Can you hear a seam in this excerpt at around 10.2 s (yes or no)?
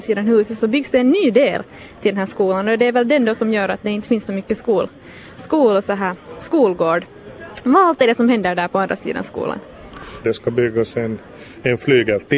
yes